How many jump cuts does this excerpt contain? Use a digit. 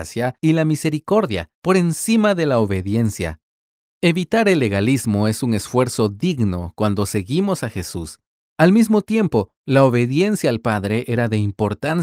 1